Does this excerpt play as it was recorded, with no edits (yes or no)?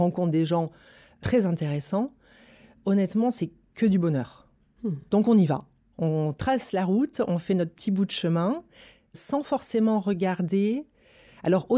yes